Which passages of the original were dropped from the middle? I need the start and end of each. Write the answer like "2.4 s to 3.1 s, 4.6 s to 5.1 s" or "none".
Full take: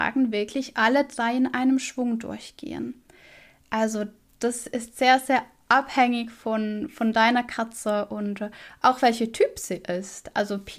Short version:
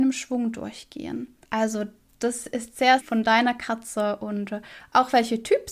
3.1 s to 3.6 s, 5.2 s to 6.9 s